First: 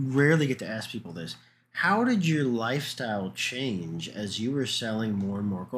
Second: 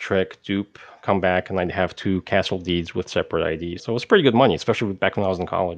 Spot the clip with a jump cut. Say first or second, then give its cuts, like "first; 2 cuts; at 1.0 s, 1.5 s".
second; 1 cut; at 3.8 s